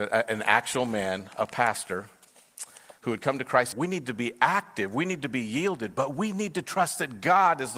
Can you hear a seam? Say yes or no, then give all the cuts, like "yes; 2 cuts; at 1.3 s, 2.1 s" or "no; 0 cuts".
yes; 1 cut; at 3.7 s